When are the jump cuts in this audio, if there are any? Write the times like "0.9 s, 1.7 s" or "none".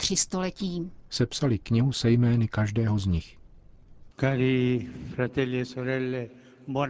1.1 s, 4.1 s

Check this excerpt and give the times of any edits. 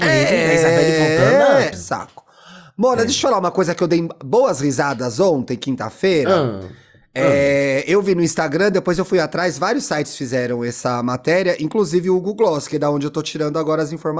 1.7 s

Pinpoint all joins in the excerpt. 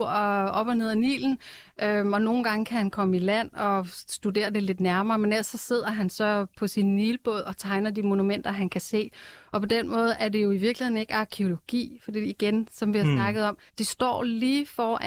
13.7 s

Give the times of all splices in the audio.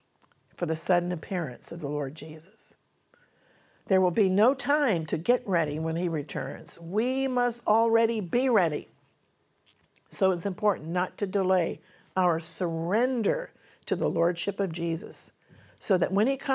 none

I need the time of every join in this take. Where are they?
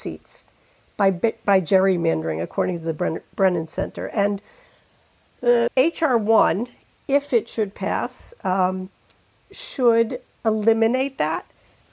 5.7 s

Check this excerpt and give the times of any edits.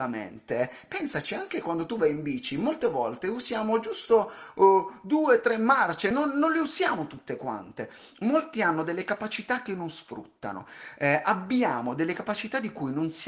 none

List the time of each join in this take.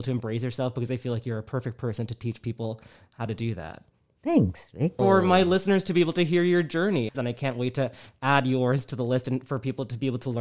5.0 s, 7.1 s

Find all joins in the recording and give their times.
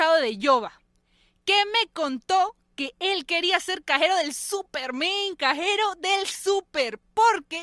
none

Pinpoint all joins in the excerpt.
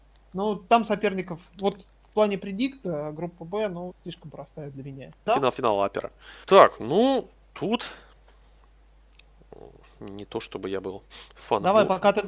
5.3 s, 6.4 s

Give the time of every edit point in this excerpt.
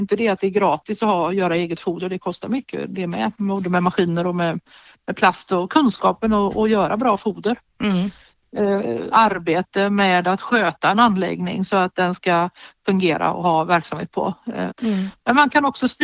9.1 s, 14.7 s

